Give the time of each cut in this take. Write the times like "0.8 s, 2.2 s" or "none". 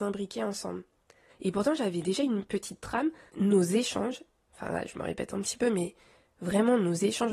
1.3 s, 3.3 s

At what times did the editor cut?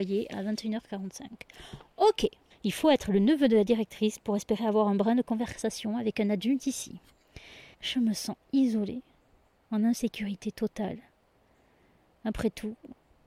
2.5 s, 7.7 s

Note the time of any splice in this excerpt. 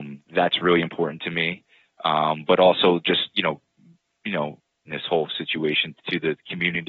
4.9 s, 6.0 s

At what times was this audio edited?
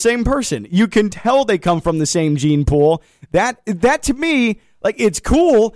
none

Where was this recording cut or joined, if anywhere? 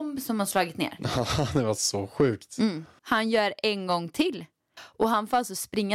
3.0 s, 4.8 s

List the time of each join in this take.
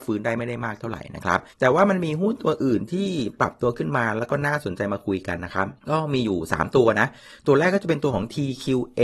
1.5 s, 5.8 s

